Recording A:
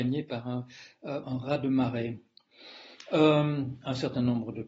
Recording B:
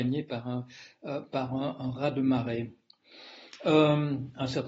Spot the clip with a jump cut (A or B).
A